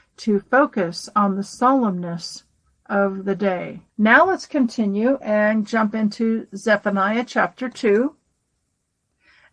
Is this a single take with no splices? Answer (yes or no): no